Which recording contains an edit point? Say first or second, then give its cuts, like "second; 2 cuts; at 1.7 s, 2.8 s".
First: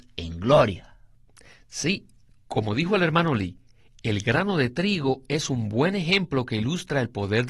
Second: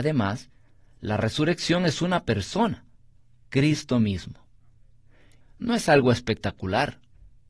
second; 1 cut; at 5.4 s